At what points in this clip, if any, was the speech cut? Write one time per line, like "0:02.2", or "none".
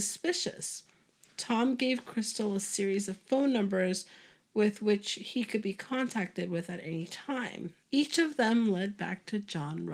0:07.8